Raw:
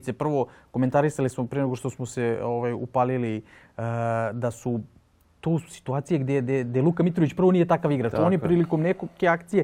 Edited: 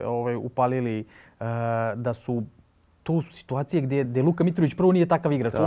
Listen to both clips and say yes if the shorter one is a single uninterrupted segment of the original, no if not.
no